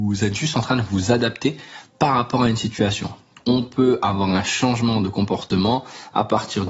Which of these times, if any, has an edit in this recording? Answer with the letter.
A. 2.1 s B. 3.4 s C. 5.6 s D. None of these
B